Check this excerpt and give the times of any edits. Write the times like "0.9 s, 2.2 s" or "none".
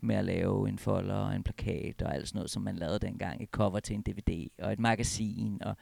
none